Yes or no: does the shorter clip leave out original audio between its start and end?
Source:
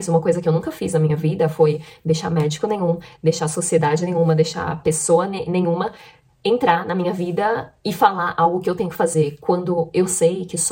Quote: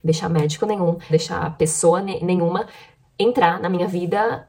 yes